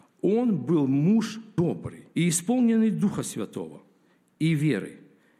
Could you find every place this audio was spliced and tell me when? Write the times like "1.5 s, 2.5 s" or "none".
2.1 s